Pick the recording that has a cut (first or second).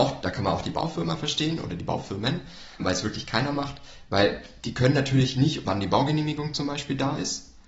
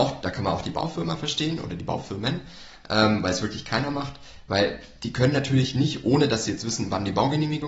first